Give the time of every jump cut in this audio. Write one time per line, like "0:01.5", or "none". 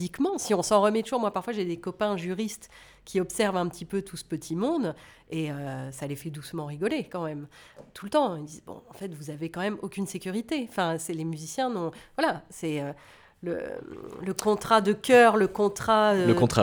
none